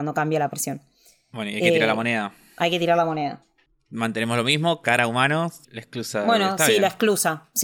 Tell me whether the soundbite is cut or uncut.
cut